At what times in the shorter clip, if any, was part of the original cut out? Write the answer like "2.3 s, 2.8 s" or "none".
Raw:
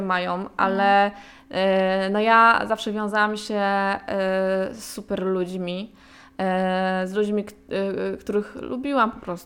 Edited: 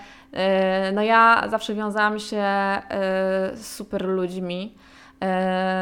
none